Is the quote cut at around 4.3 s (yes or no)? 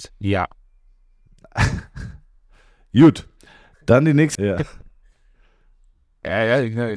yes